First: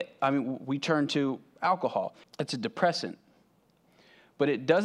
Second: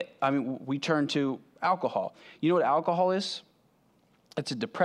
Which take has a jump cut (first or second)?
first